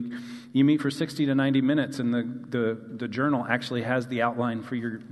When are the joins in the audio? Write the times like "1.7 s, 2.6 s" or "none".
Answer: none